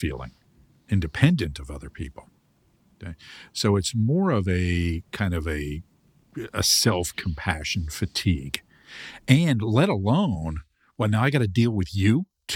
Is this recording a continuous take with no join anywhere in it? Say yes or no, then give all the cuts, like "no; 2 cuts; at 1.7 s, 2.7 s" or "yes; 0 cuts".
yes; 0 cuts